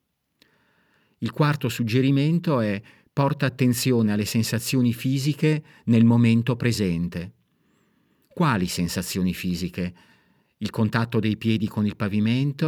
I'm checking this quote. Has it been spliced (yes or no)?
no